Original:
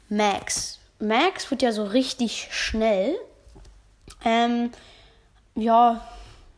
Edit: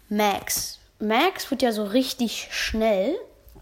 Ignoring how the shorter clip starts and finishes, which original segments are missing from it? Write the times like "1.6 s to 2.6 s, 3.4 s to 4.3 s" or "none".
none